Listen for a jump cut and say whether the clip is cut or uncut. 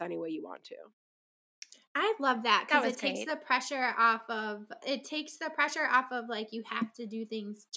cut